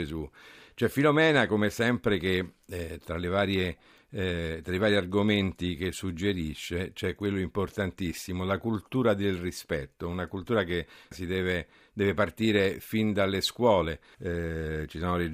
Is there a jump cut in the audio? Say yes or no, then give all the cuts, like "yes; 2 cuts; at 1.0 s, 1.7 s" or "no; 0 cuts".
yes; 2 cuts; at 11.1 s, 14.1 s